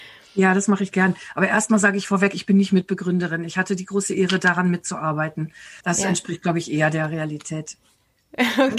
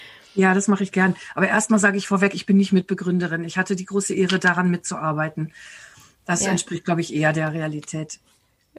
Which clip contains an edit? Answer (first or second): first